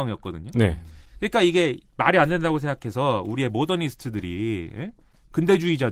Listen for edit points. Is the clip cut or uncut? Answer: uncut